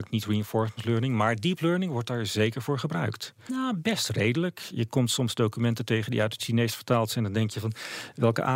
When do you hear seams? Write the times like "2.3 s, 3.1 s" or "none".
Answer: 3.5 s